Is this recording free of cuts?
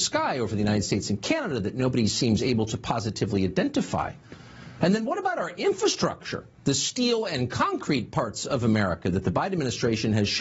no; 2 cuts; at 4.8 s, 6.6 s

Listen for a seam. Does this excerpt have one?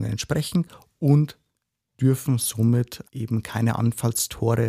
yes; 1 cut; at 3.0 s

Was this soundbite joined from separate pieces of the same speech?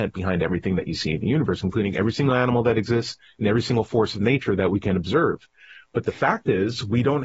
no; 0 cuts

